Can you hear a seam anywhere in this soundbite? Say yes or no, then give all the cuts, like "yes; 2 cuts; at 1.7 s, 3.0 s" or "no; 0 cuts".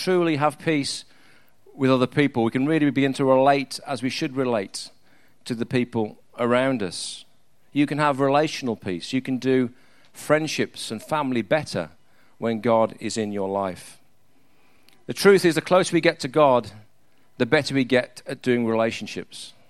no; 0 cuts